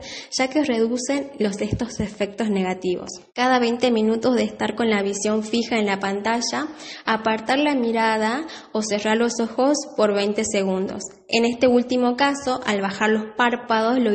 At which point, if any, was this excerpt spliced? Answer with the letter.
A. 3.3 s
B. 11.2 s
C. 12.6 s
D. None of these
A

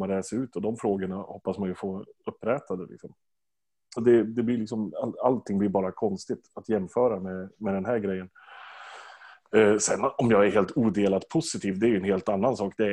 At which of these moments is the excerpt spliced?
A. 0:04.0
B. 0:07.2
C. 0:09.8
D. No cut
A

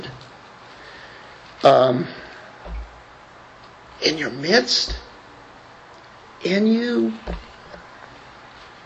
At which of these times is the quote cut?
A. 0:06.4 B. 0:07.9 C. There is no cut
C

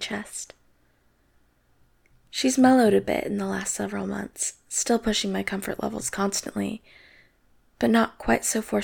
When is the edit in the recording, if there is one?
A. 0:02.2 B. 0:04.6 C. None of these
A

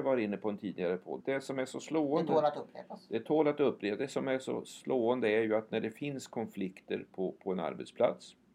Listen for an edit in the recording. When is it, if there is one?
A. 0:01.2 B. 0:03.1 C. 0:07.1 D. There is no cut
A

